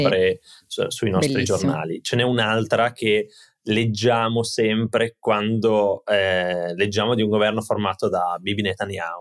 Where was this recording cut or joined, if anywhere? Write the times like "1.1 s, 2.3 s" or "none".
none